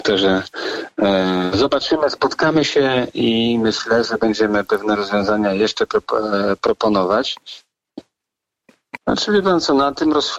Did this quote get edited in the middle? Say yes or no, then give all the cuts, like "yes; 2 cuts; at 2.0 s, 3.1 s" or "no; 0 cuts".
yes; 1 cut; at 9.0 s